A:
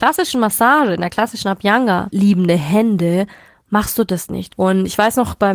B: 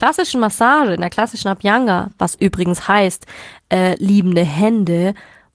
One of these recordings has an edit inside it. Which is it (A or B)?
A